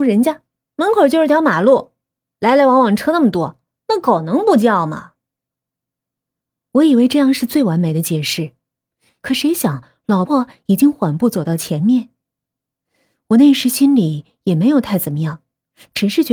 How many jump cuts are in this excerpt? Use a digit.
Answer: 1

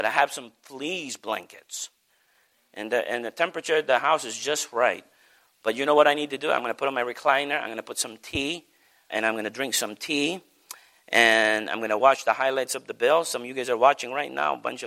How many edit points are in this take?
1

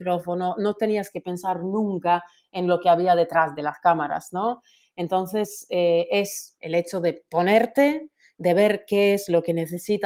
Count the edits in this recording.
0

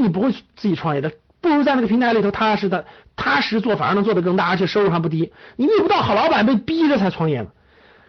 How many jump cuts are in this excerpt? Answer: 0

